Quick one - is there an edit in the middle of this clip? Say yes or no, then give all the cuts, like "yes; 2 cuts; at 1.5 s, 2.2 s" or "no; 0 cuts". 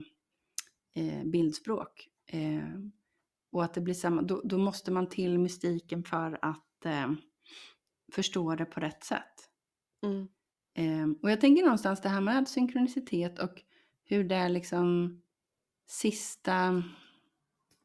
no; 0 cuts